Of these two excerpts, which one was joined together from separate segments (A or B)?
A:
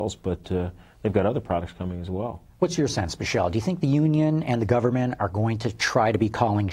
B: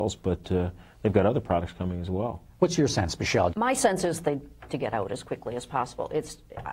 B